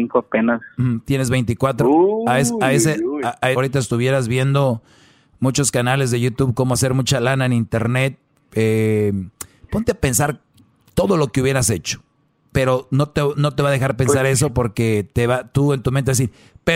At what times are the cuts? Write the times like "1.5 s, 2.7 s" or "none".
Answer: 3.5 s, 8.4 s